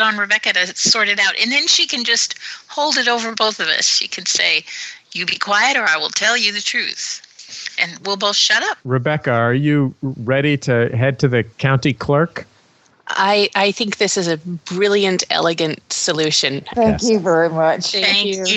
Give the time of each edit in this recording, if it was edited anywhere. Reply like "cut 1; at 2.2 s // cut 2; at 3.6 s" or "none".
cut 1; at 8.8 s // cut 2; at 16.7 s